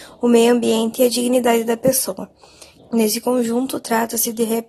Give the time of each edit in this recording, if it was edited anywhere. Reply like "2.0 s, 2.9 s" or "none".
2.8 s